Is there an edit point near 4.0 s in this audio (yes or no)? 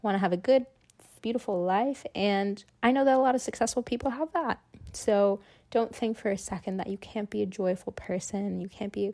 yes